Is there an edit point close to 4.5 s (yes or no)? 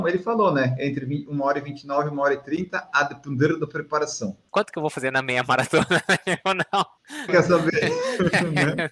yes